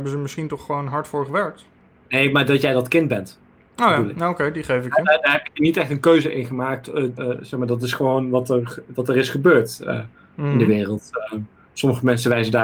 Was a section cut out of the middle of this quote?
yes; 1 cut; at 7.2 s

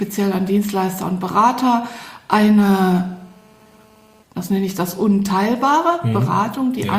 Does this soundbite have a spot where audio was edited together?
yes; 1 cut; at 4.2 s

